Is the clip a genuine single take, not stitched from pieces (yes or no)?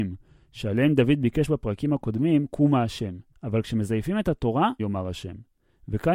no